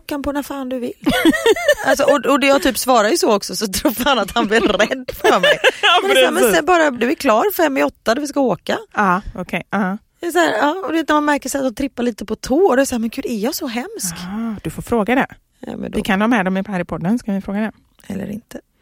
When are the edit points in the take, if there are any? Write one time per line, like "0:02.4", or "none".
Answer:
none